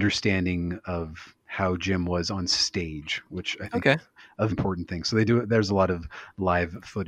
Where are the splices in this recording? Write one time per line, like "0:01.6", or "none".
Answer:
0:01.4
0:04.5